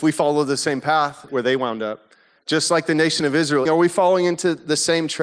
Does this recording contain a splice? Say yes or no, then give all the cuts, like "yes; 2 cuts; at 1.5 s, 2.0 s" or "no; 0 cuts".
yes; 2 cuts; at 1.3 s, 3.7 s